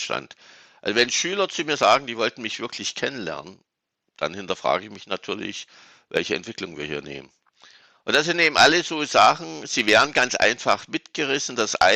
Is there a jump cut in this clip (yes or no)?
no